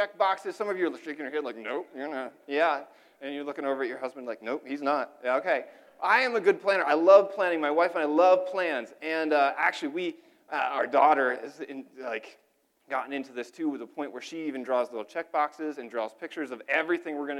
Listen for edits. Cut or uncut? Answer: uncut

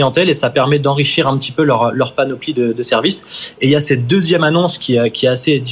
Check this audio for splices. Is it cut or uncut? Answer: uncut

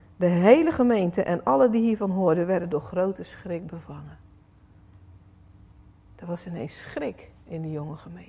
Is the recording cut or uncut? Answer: uncut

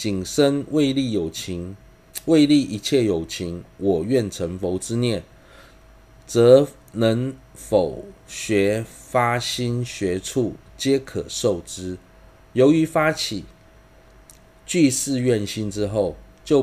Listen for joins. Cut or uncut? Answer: uncut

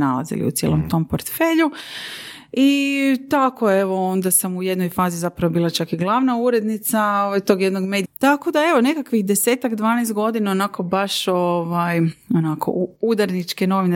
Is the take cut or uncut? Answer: cut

